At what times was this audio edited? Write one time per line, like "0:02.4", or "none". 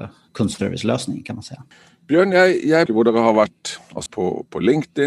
0:02.9
0:04.1